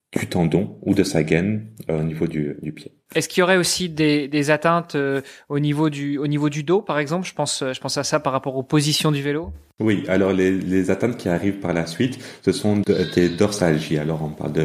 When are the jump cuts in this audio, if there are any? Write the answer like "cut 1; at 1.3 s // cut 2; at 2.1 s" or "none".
none